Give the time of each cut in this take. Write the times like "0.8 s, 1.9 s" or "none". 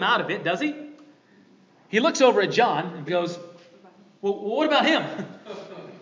3.1 s